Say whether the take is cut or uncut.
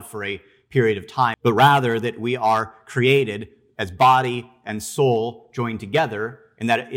cut